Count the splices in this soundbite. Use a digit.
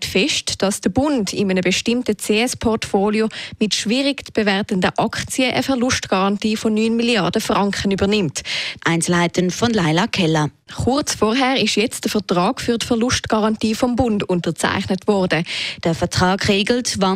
3